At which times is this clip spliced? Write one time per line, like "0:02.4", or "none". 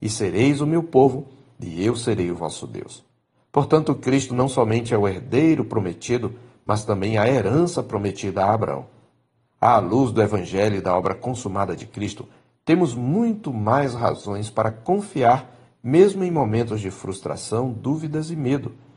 none